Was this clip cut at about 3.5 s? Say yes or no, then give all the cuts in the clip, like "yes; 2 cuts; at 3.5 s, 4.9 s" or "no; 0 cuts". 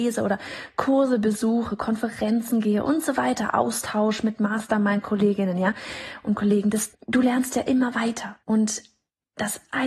no; 2 cuts; at 6.9 s, 8.4 s